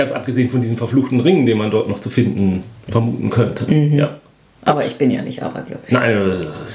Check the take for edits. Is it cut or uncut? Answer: uncut